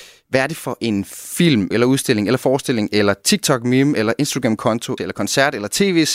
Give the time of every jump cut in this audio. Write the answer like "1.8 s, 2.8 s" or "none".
1.7 s, 5.0 s